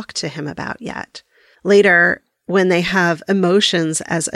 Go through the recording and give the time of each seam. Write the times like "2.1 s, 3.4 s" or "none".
1.5 s